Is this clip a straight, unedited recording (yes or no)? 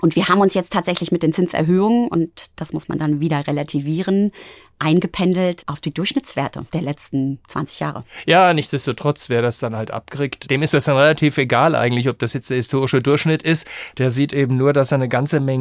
yes